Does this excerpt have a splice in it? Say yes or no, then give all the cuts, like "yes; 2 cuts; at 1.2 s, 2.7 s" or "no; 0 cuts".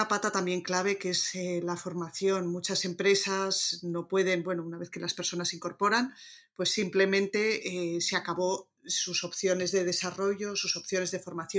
no; 0 cuts